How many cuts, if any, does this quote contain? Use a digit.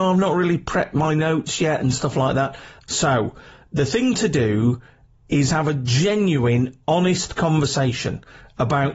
1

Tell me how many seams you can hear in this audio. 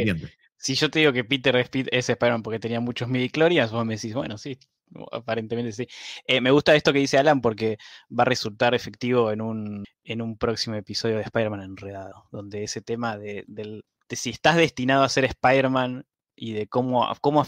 1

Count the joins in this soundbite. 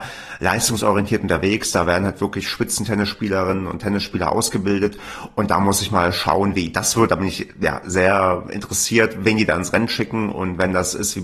0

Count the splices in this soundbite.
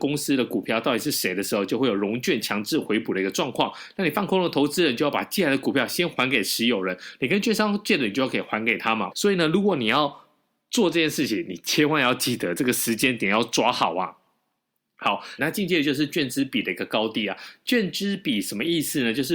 2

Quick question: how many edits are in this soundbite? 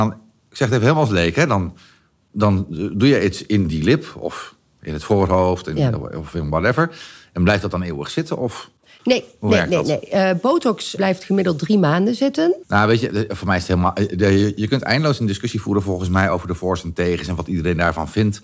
2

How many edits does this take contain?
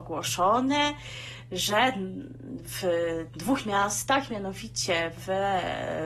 0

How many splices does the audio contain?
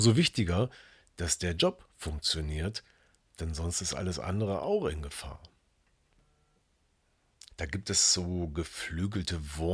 1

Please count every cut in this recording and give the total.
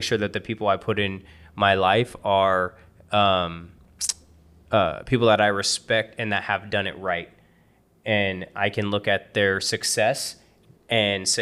0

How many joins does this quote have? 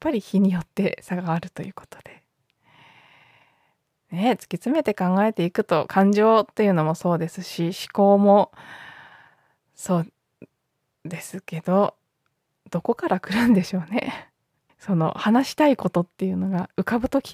1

